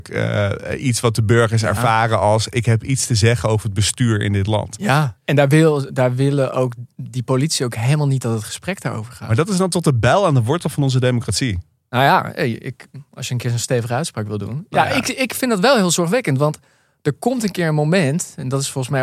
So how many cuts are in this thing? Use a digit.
1